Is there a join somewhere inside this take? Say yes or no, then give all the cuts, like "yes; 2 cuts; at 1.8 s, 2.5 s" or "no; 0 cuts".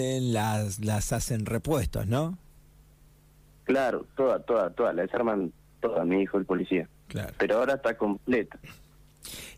no; 0 cuts